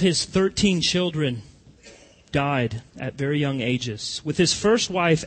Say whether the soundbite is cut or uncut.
uncut